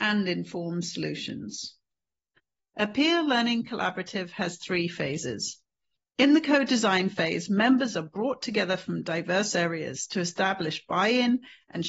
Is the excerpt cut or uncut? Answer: uncut